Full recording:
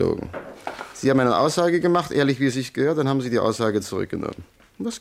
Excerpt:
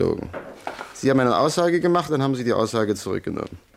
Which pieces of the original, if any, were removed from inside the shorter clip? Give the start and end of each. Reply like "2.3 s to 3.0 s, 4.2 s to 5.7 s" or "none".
2.1 s to 2.9 s